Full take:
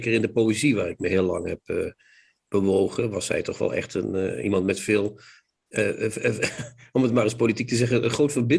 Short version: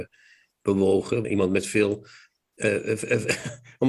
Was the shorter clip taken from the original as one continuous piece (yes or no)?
no